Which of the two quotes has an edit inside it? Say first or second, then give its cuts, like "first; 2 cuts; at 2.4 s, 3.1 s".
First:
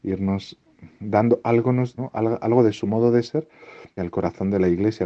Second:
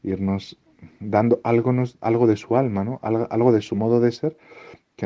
first; 2 cuts; at 2.0 s, 4.0 s